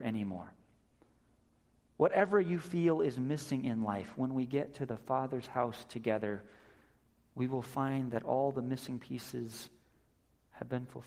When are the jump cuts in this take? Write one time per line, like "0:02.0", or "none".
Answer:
none